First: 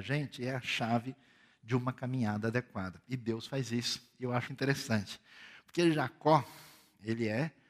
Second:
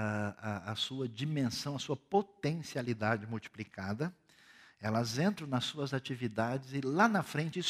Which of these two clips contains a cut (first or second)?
first